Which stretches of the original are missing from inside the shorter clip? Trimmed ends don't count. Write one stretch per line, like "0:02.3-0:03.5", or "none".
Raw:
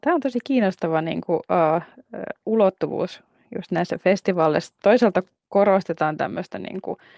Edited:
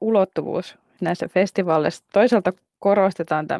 0:03.4-0:03.7